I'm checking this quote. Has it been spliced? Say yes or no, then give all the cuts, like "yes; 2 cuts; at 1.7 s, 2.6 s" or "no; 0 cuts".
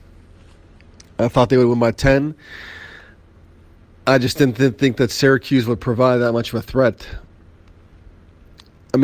no; 0 cuts